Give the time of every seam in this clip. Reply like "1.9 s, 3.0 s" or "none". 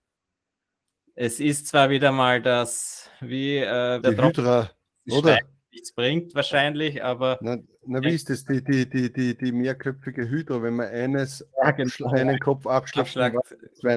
4.0 s